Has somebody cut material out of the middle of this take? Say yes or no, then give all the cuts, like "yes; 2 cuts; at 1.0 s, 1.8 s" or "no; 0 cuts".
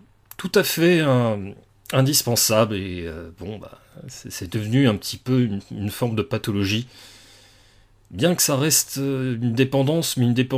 no; 0 cuts